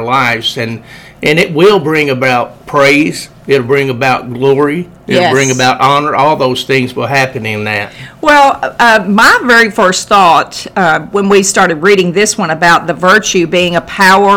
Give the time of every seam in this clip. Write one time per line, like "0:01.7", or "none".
none